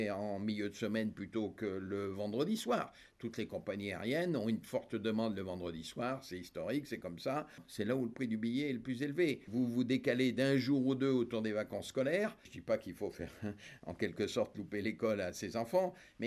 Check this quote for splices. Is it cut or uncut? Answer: uncut